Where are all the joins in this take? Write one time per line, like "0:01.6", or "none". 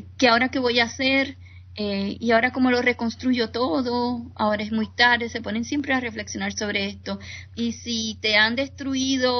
0:07.5